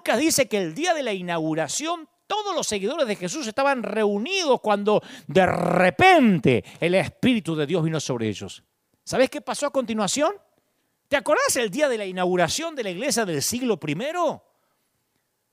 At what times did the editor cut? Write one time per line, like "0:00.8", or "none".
0:11.0

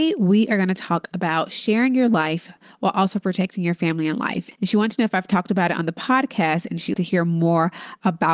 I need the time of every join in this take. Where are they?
0:04.5
0:06.9

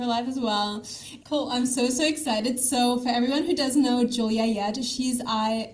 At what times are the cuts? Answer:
0:01.2

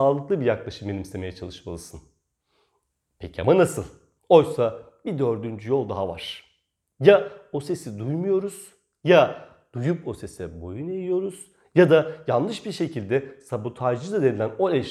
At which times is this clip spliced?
0:04.2
0:06.8

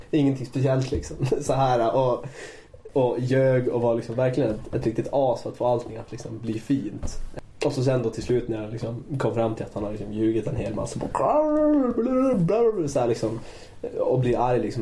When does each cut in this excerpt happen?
none

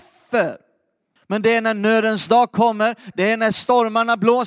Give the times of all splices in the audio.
0:01.2
0:03.1

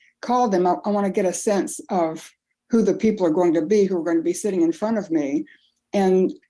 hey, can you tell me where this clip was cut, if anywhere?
none

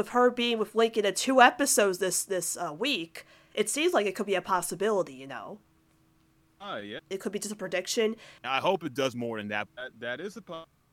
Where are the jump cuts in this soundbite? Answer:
0:07.1
0:08.4
0:09.7

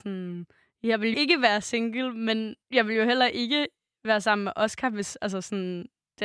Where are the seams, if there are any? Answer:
0:01.1
0:02.6

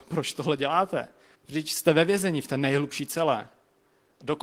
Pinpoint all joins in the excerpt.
0:01.4

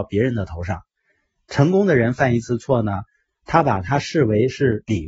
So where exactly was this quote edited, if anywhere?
none

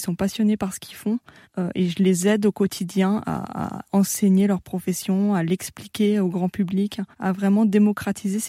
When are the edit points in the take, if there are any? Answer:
0:01.4
0:07.1

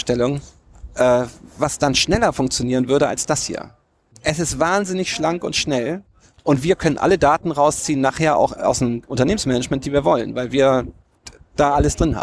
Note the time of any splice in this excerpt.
0:04.1

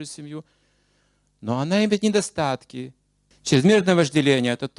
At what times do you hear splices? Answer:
0:03.3

